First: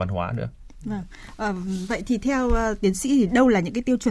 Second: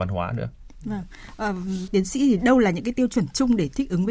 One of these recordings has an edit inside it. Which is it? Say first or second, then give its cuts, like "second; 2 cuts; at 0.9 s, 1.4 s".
second; 1 cut; at 1.9 s